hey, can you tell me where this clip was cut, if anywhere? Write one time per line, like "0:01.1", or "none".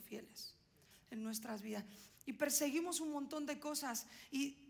0:00.9
0:02.1